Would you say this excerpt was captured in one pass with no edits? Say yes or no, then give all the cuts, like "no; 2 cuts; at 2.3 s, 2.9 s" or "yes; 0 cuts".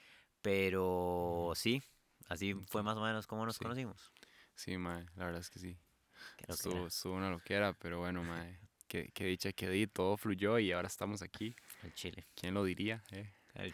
yes; 0 cuts